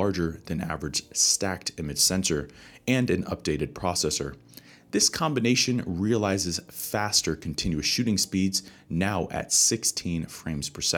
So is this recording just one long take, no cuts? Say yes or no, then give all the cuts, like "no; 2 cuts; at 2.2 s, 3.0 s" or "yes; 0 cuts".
yes; 0 cuts